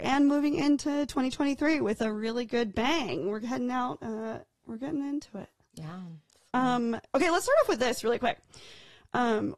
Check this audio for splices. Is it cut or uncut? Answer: uncut